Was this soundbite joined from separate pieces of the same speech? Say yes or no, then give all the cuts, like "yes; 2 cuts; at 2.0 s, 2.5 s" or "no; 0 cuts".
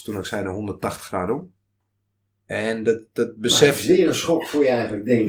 no; 0 cuts